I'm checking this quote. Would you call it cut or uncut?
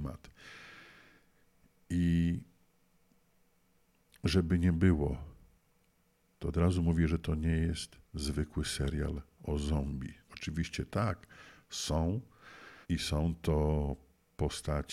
cut